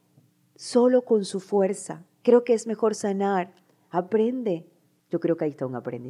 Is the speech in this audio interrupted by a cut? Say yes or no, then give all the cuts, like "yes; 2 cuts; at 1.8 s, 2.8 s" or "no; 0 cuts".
yes; 1 cut; at 5.0 s